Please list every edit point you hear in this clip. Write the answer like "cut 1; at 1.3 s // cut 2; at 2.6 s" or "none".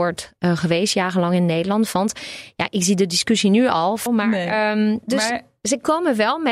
cut 1; at 4.1 s